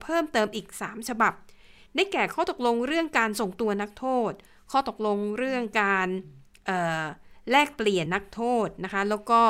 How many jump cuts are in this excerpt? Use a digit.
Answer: 1